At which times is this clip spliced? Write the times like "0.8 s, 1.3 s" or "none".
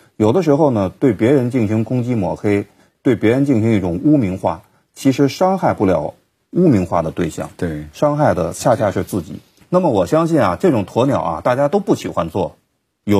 9.6 s